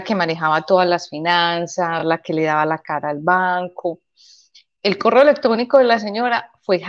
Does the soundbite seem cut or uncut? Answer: uncut